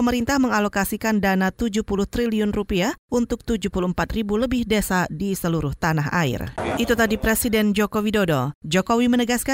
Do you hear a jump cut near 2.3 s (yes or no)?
no